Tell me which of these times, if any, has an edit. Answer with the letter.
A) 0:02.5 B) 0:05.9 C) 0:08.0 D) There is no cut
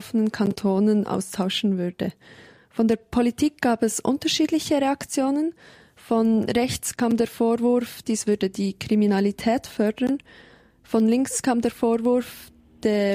C